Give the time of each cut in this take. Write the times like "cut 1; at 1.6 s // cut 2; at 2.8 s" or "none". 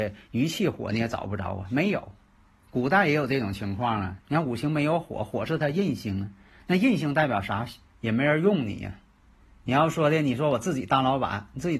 cut 1; at 4.2 s // cut 2; at 7.9 s